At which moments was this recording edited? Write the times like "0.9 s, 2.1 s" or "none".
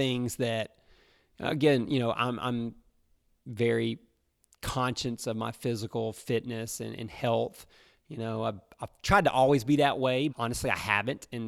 10.3 s